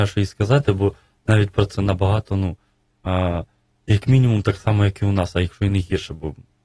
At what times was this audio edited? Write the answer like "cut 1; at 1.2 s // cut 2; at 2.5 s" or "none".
cut 1; at 1.7 s